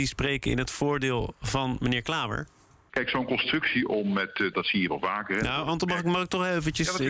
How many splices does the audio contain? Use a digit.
2